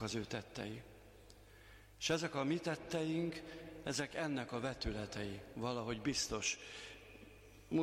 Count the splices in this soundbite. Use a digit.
0